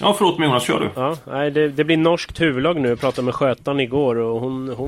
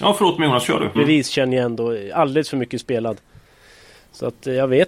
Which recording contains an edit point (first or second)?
second